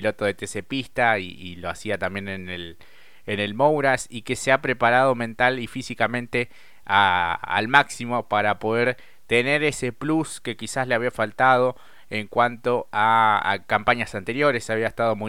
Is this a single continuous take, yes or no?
yes